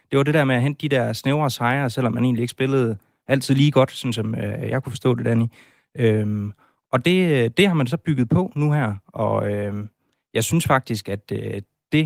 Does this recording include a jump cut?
no; 0 cuts

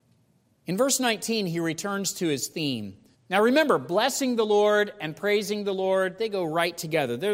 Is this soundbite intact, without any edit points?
no; 1 cut; at 3.1 s

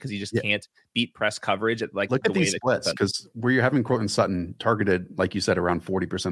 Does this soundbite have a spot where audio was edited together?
no; 0 cuts

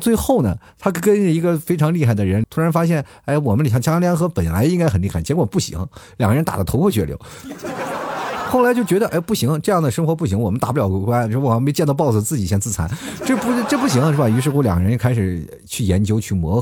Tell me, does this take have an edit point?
yes; 1 cut; at 2.4 s

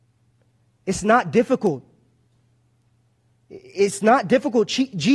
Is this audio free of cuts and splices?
no; 1 cut; at 3.3 s

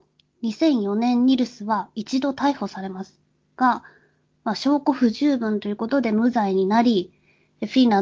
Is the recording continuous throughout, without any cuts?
yes; 0 cuts

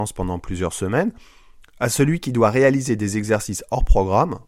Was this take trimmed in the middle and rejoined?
no; 0 cuts

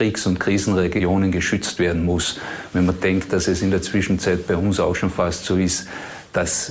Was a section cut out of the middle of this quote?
no; 0 cuts

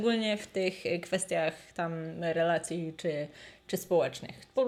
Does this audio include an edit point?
no; 0 cuts

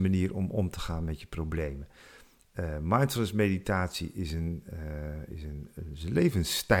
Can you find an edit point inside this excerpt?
no; 0 cuts

